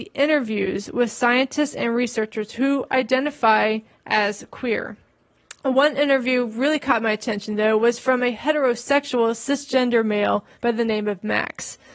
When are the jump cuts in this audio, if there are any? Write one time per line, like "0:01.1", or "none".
0:10.5